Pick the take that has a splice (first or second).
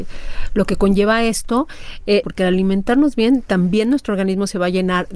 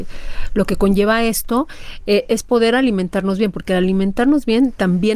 first